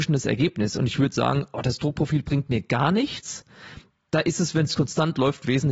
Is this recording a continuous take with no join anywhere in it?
yes; 0 cuts

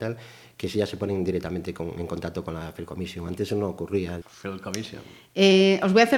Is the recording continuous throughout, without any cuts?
no; 1 cut; at 4.2 s

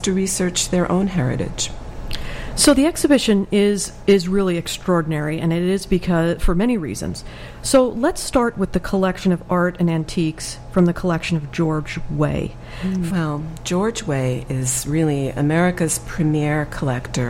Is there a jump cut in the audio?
yes; 1 cut; at 13.1 s

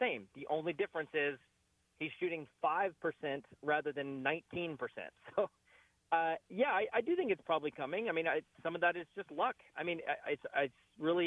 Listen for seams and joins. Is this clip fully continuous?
yes; 0 cuts

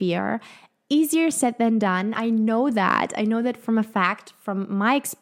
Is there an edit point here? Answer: no; 0 cuts

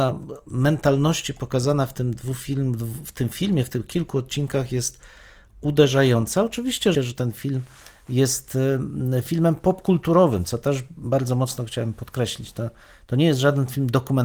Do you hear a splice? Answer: yes; 1 cut; at 6.9 s

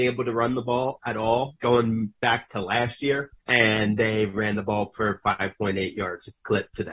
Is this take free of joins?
no; 2 cuts; at 1.6 s, 3.4 s

